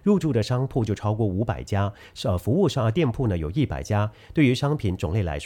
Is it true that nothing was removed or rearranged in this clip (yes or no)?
yes